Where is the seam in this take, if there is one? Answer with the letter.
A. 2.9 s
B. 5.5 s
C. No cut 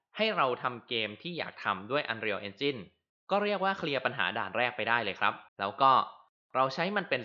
B